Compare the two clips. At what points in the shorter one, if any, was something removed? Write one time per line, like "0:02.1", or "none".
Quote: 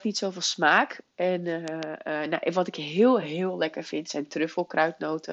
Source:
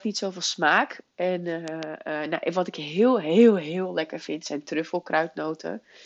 0:03.2